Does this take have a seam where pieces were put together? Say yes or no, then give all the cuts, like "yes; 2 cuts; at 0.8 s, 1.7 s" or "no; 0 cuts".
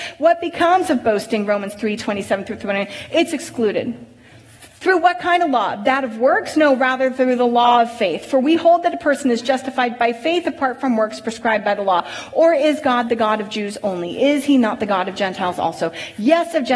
no; 0 cuts